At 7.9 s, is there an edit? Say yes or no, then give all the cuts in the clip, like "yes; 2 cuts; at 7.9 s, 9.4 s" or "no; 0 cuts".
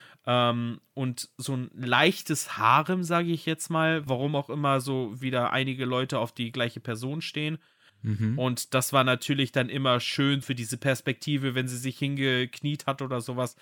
yes; 3 cuts; at 4.1 s, 7.9 s, 10.4 s